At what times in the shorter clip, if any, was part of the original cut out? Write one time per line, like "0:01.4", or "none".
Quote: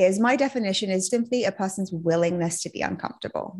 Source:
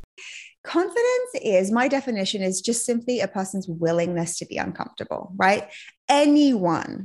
0:01.1